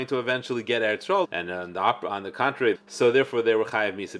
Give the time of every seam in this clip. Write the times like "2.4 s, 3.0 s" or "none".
1.2 s, 2.7 s